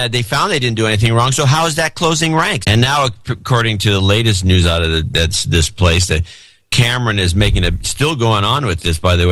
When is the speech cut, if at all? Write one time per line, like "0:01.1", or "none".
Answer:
0:02.6